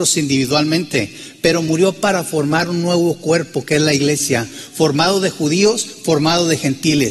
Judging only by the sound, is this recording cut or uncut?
uncut